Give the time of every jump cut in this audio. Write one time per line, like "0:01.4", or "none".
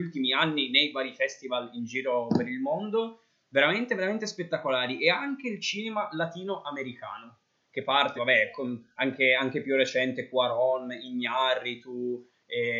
0:08.2